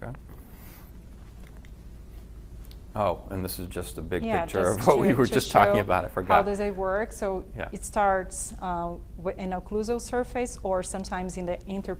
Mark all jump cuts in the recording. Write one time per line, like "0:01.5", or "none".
none

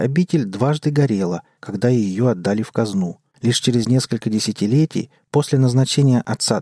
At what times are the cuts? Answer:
0:01.6
0:03.3

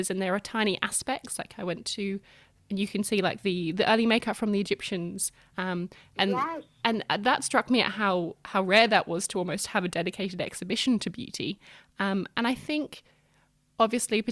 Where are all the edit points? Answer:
0:05.5

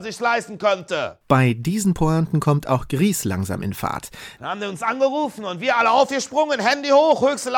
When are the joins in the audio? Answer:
0:04.4

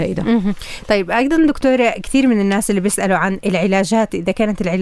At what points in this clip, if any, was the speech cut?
none

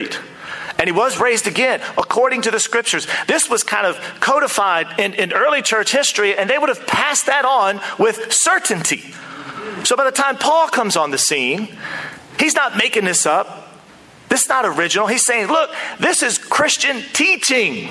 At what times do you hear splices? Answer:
none

